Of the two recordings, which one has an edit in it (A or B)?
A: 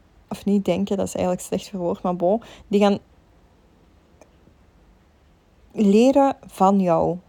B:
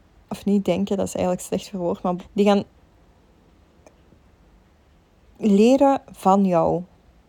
B